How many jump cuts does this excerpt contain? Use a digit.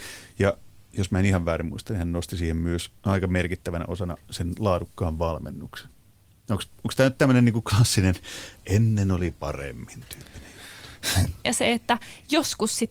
1